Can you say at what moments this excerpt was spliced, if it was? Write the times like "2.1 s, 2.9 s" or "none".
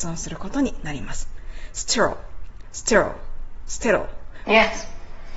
2.6 s, 4.4 s